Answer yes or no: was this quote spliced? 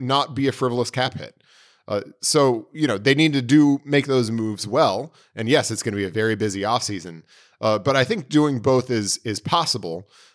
no